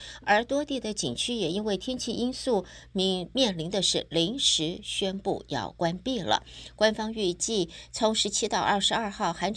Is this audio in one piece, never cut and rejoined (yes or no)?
yes